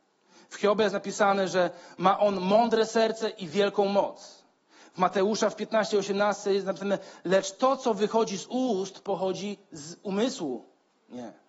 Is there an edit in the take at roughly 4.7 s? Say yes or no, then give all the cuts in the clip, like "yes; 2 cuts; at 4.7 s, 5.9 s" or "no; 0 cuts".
no; 0 cuts